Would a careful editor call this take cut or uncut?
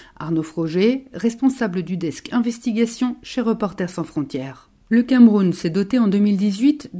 cut